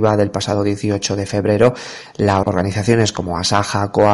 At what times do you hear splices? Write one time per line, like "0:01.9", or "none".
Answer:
0:02.4